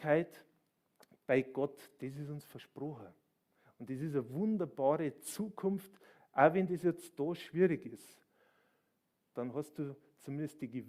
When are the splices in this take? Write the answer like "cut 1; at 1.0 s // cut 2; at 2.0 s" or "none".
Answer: none